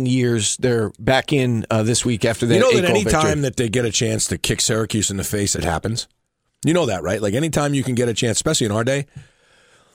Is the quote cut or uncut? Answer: cut